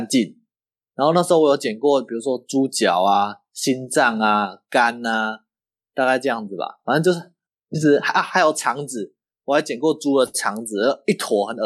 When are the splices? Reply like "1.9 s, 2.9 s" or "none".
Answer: none